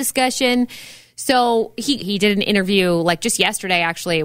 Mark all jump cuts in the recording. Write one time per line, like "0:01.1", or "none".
0:02.0

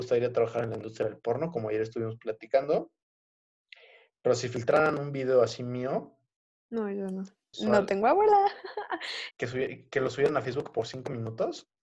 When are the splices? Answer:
0:07.5
0:09.3

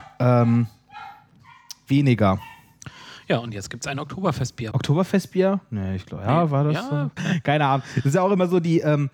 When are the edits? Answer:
0:04.7
0:07.2

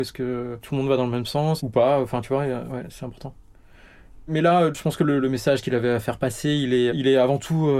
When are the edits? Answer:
0:05.2
0:06.9

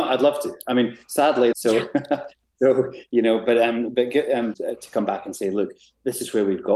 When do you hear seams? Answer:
0:01.5
0:04.5

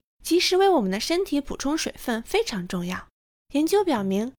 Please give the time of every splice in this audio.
0:03.4

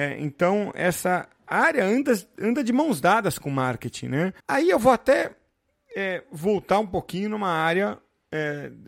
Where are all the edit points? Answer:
0:04.4

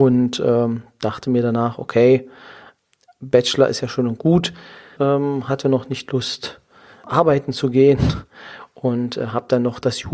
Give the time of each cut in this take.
0:05.0
0:06.1

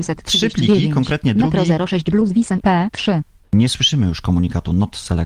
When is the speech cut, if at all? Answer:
0:03.4

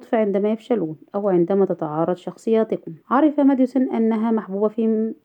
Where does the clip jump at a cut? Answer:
0:03.0

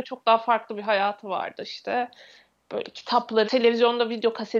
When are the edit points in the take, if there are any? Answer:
0:03.4

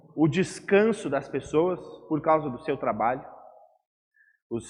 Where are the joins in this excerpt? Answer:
none

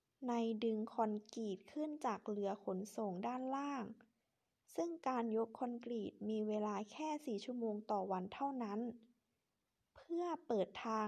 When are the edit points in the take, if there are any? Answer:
none

